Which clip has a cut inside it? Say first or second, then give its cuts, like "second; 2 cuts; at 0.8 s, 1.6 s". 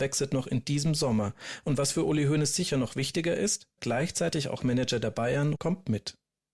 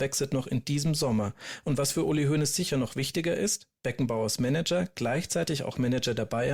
first; 2 cuts; at 3.8 s, 5.6 s